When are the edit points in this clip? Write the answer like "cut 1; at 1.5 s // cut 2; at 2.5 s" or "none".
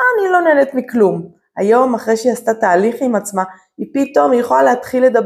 none

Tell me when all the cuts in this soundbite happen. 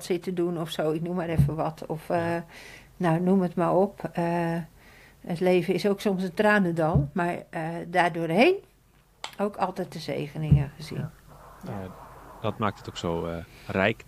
none

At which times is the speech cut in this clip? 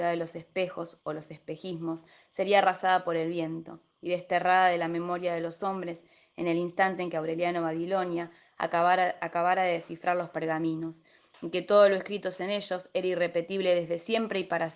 none

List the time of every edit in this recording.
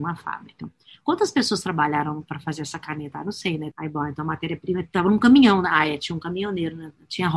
cut 1; at 3.7 s

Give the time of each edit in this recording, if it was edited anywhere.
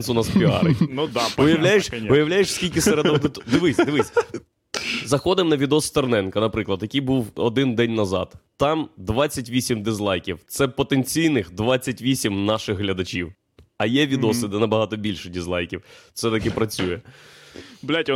none

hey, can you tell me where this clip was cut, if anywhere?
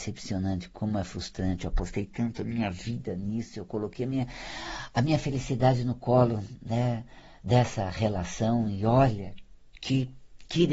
none

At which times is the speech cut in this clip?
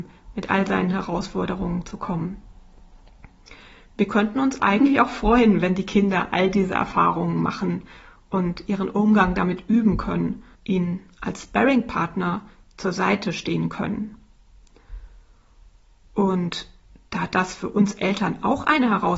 cut 1; at 4.6 s // cut 2; at 10.5 s

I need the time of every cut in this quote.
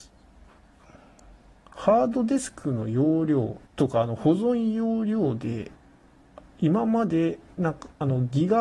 cut 1; at 3.6 s

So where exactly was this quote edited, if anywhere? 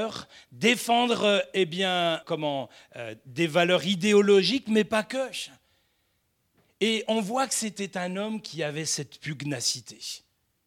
cut 1; at 2.2 s

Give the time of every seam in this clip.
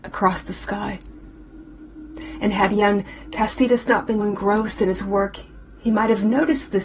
cut 1; at 4.2 s

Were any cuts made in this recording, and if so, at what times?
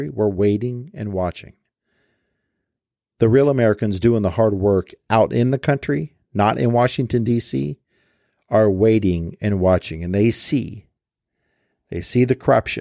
none

